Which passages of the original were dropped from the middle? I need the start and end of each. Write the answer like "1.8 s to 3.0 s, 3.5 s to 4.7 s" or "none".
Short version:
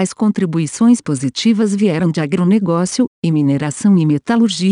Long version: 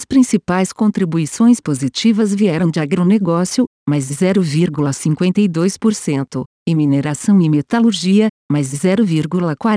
3.7 s to 6.5 s